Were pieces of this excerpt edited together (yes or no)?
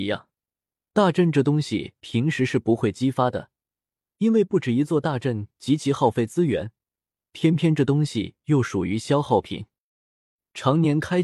no